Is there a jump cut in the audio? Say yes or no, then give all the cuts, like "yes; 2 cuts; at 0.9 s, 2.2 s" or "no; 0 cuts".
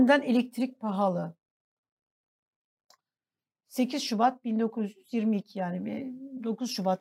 no; 0 cuts